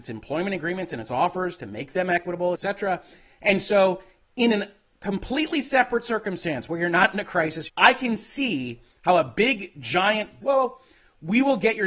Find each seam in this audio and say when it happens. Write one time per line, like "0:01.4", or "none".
0:02.6
0:07.7
0:10.4